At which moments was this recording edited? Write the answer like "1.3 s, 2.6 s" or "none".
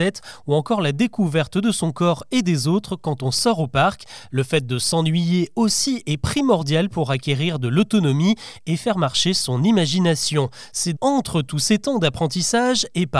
10.9 s